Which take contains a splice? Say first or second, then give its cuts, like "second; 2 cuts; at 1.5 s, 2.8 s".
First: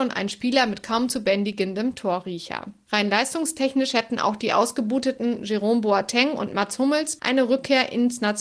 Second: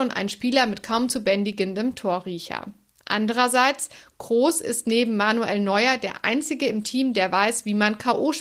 first; 2 cuts; at 2.9 s, 7.2 s